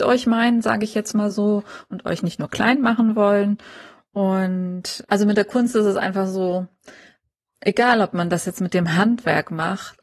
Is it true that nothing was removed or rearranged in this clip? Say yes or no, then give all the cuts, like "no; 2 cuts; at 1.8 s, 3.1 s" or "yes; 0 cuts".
no; 1 cut; at 5.0 s